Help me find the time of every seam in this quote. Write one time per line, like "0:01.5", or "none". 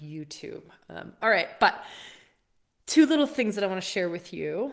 none